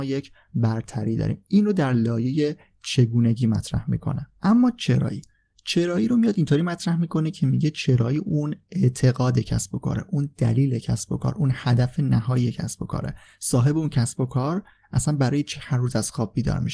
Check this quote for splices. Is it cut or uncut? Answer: cut